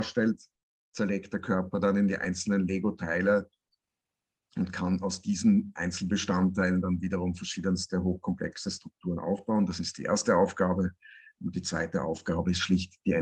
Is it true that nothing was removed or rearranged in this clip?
yes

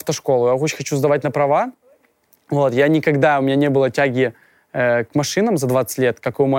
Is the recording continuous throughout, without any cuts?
yes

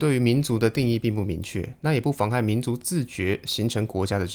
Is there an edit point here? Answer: no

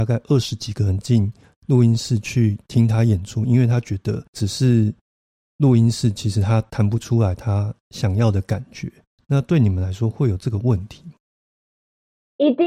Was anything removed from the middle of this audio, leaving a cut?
yes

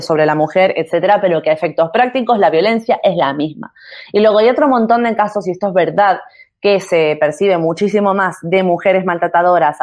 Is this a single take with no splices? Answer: yes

